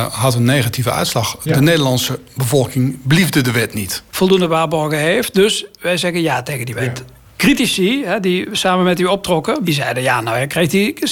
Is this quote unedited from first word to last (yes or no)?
no